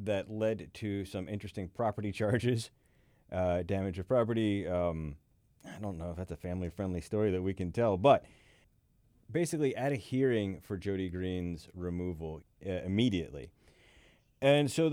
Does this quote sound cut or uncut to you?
cut